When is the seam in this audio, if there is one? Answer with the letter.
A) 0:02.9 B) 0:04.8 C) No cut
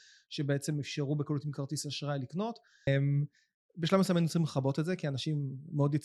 A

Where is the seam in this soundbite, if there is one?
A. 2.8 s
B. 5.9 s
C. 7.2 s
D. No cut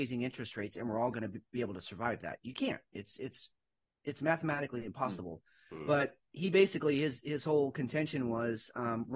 D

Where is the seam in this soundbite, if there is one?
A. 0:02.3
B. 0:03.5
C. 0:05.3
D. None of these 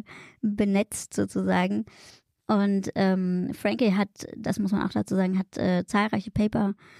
D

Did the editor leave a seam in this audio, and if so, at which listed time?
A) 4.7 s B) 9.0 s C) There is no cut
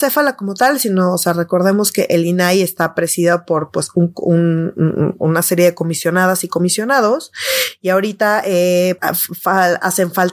B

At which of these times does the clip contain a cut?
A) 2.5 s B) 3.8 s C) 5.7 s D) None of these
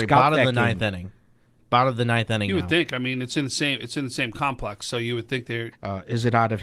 C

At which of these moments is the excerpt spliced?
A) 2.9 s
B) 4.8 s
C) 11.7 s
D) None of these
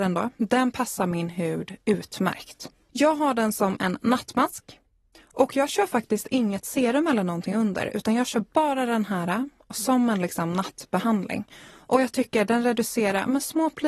A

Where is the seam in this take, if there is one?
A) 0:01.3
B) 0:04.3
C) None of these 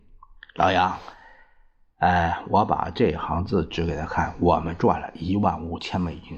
C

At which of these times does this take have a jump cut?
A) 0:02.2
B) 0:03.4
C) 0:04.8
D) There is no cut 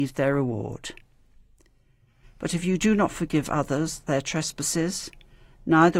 A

